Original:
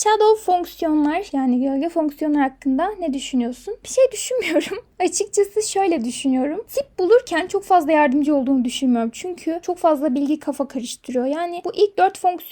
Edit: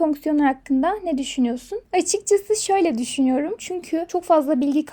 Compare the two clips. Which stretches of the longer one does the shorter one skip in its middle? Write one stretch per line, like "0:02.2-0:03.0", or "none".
0:03.8-0:04.9
0:06.6-0:09.1